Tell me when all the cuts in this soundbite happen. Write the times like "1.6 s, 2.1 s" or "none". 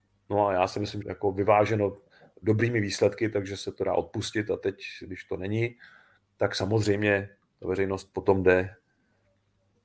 1.0 s